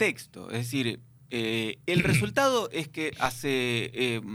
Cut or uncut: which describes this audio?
uncut